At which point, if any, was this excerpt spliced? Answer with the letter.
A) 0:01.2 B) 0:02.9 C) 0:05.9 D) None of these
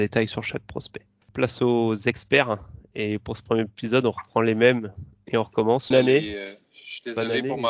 C